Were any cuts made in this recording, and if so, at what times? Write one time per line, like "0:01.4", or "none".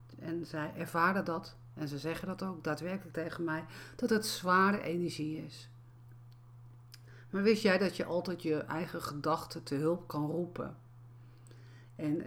none